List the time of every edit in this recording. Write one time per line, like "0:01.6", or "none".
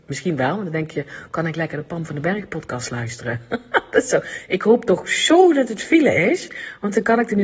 none